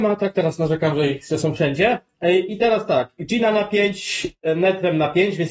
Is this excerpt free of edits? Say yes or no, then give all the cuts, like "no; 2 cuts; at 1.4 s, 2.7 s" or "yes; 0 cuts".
yes; 0 cuts